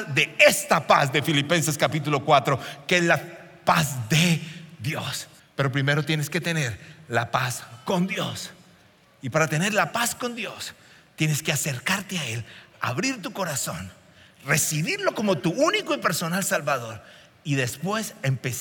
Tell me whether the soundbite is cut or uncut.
cut